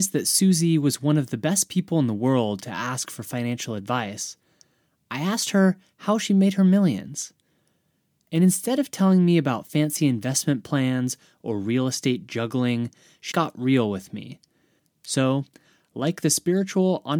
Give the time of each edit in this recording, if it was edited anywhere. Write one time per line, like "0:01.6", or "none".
0:13.3
0:14.8